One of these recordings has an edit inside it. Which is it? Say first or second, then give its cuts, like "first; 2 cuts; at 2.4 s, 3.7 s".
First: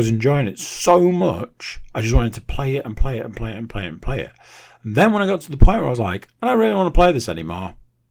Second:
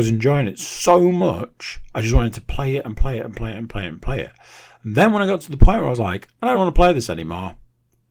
second; 1 cut; at 6.5 s